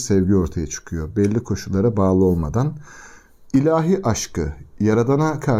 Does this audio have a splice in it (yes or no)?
no